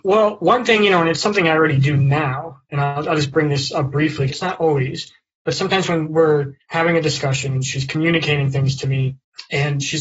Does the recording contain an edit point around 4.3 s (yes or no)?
yes